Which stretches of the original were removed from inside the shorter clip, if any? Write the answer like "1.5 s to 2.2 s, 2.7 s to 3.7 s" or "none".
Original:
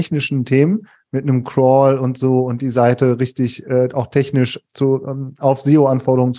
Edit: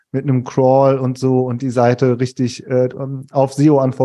3.9 s to 5.0 s